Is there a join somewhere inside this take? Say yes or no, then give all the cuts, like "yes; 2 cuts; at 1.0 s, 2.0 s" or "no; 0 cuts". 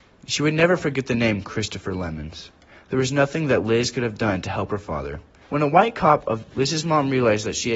yes; 2 cuts; at 5.5 s, 6.5 s